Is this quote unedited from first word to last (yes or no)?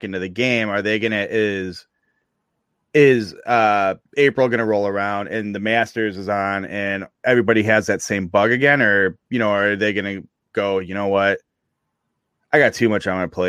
no